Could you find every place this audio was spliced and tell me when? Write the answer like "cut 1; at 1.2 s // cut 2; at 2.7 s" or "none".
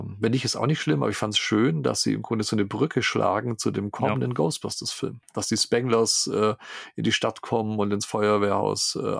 none